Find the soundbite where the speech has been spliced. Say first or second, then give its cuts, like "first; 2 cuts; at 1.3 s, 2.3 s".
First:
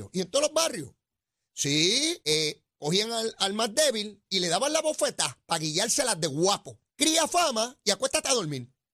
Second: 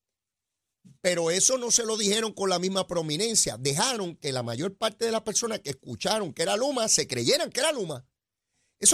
first; 2 cuts; at 2.2 s, 6.9 s